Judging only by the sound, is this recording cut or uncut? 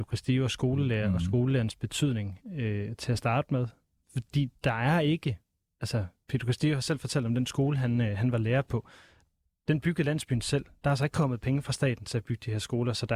uncut